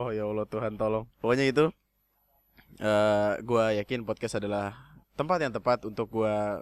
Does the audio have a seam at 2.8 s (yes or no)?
no